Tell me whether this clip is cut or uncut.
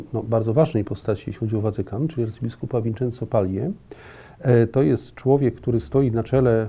uncut